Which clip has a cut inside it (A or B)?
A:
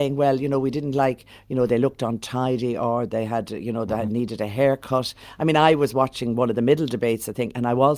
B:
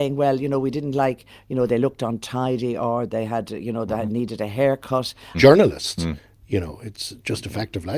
B